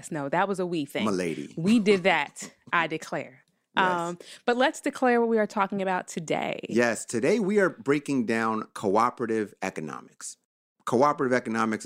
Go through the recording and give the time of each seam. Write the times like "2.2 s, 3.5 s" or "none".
none